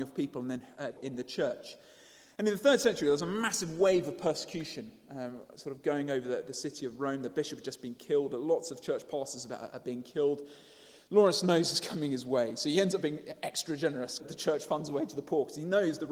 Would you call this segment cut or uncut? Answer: cut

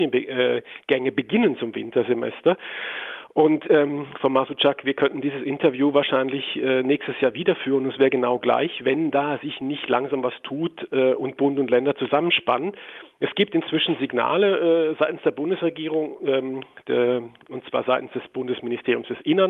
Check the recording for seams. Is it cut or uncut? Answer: uncut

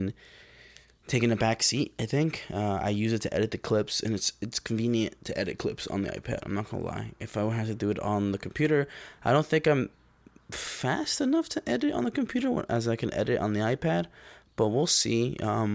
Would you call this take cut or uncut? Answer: uncut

